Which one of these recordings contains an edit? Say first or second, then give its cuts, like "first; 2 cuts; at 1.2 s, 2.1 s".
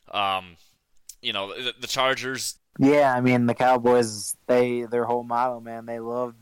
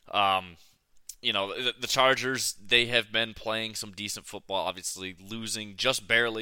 first; 1 cut; at 2.6 s